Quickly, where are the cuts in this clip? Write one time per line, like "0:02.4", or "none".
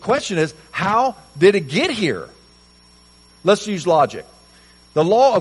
none